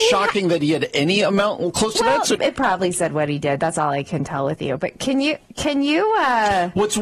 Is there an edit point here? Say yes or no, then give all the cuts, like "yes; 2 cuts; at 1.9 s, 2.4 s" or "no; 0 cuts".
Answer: yes; 1 cut; at 2.4 s